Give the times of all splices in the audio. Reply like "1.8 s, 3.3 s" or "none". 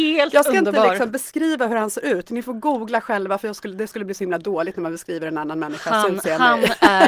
none